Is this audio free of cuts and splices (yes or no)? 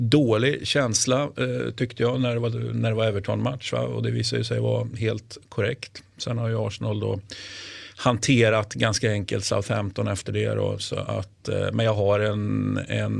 yes